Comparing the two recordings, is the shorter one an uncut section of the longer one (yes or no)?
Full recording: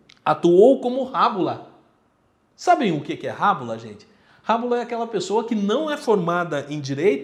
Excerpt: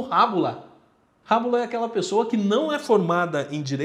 no